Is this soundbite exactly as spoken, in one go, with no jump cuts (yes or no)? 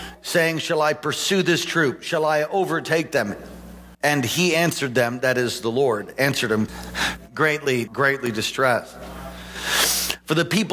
no